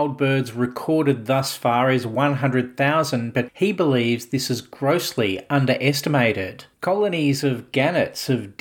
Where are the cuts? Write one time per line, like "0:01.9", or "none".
0:06.7